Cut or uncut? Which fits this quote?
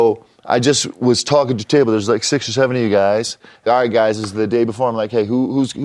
cut